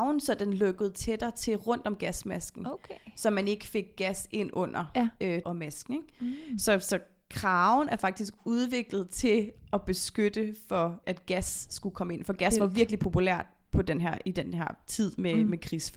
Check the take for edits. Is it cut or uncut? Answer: cut